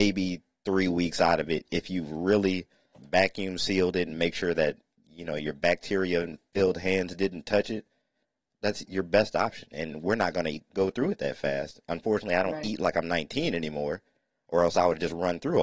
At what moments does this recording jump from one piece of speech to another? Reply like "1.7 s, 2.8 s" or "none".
2.9 s